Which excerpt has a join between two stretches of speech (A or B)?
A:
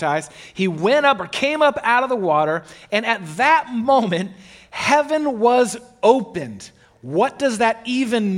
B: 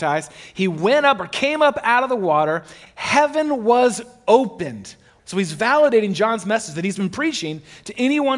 B